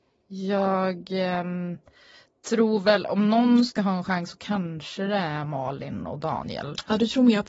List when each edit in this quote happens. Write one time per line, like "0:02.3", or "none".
none